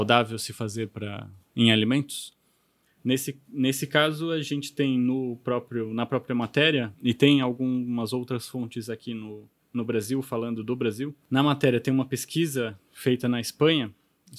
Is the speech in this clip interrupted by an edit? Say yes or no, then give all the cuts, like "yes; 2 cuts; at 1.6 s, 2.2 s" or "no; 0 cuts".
yes; 1 cut; at 6.9 s